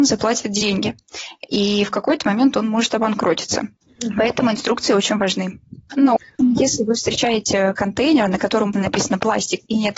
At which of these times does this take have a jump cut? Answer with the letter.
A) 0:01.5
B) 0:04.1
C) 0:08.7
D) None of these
C